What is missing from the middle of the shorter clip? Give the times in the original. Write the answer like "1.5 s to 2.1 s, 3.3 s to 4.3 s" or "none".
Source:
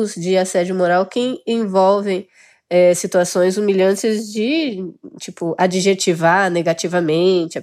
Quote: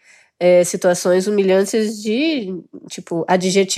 none